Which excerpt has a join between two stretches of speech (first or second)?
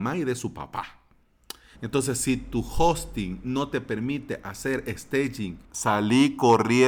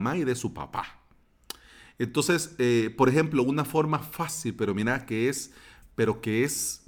first